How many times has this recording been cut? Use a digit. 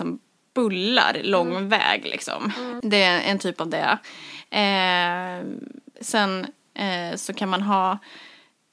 1